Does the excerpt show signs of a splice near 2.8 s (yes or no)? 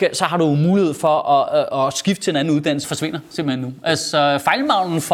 yes